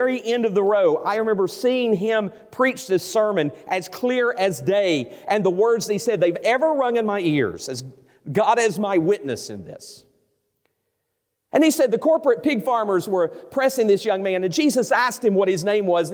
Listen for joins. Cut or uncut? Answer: uncut